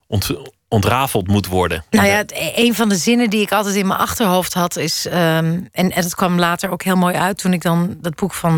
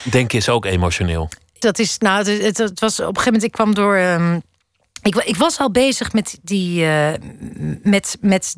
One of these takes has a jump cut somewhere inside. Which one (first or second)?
second